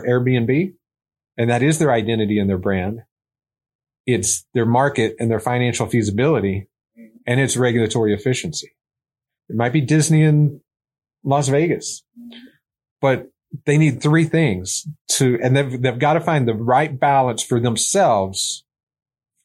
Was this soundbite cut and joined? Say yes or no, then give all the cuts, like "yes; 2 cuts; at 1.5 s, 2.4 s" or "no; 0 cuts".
yes; 2 cuts; at 1.3 s, 9.4 s